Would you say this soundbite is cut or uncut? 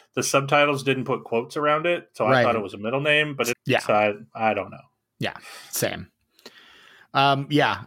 cut